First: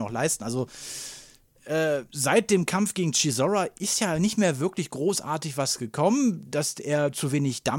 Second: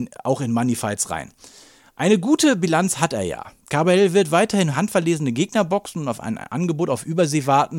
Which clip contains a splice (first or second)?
first